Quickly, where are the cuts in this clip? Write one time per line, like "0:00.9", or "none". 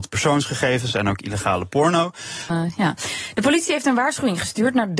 0:02.5